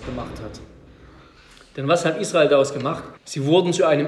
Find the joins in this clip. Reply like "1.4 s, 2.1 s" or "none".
3.2 s